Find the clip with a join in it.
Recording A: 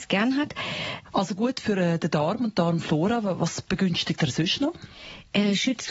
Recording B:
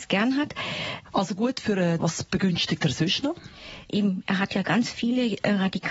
B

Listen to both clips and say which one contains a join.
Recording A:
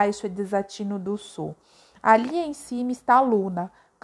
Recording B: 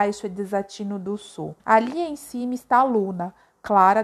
B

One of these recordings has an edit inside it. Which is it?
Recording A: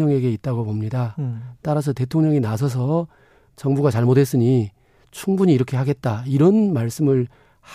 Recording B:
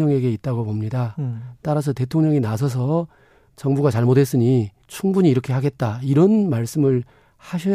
B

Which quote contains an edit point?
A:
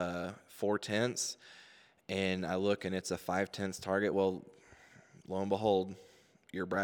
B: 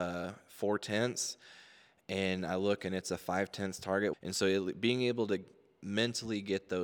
B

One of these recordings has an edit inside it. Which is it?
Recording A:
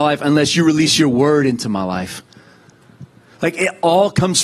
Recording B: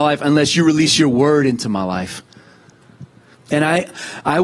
B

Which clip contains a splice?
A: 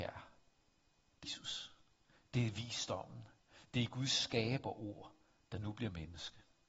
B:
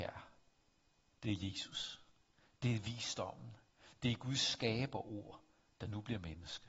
A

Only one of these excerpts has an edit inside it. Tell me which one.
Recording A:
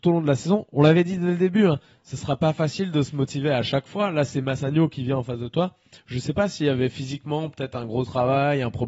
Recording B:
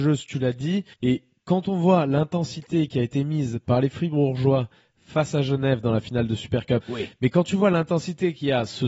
B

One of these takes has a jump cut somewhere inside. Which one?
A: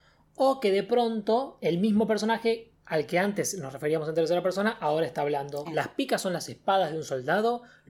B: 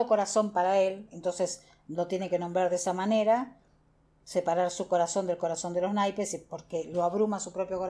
A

